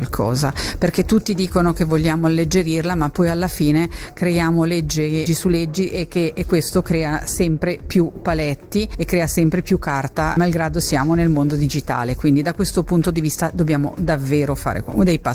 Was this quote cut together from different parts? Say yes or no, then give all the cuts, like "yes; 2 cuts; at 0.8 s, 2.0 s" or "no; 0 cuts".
yes; 1 cut; at 5.3 s